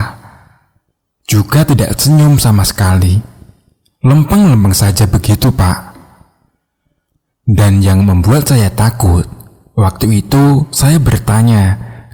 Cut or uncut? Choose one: uncut